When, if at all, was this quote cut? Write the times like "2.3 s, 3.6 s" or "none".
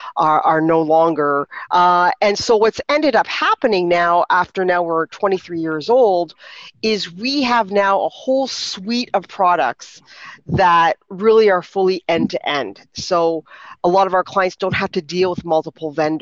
1.7 s